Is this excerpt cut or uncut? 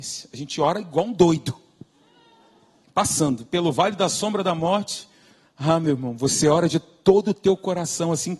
cut